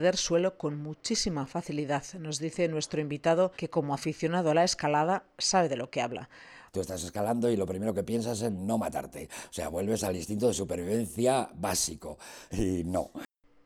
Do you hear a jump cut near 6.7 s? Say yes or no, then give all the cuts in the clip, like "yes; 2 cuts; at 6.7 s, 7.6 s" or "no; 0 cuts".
yes; 3 cuts; at 3.5 s, 6.7 s, 12.5 s